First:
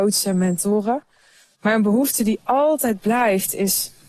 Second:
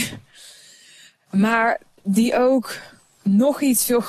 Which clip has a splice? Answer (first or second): first